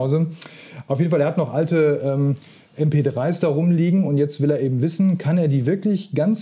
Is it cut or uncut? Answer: uncut